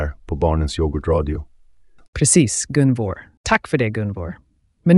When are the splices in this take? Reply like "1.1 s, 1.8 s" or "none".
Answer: 2.0 s, 3.4 s

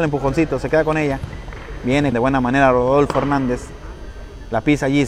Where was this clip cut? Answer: 2.1 s

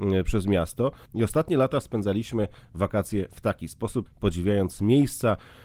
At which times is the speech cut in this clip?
1.1 s, 4.1 s

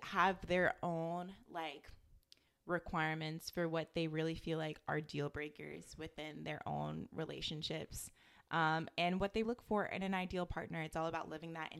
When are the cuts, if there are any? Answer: 9.4 s

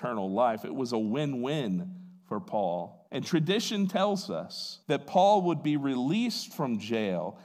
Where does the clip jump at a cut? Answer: 3.1 s, 4.8 s

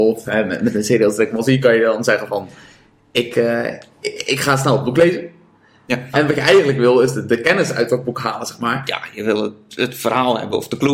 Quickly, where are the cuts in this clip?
6.1 s

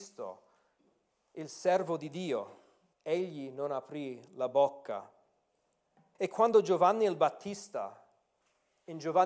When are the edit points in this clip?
2.9 s, 6.2 s

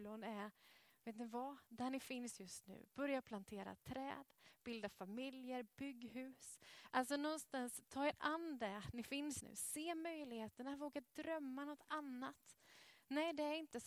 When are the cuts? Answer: 9.4 s

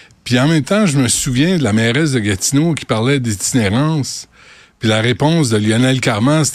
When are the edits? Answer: none

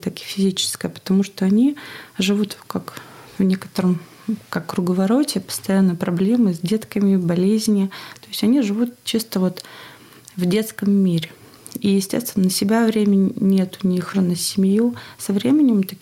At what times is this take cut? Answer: 14.1 s

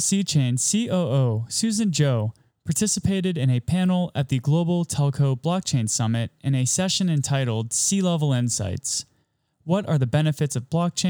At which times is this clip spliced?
none

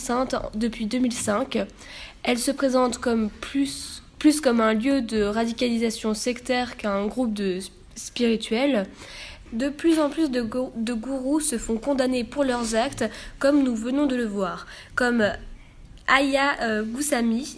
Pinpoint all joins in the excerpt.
9.5 s

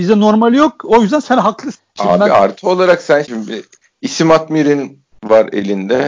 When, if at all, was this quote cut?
3.2 s

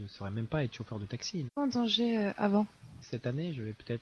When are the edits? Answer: 1.5 s, 3.0 s

